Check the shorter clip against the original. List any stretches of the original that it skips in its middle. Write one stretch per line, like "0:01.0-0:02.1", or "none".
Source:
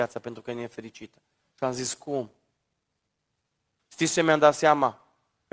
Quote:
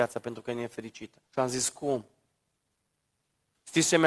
0:01.2-0:01.5